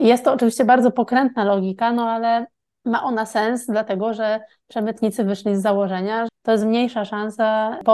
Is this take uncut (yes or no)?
no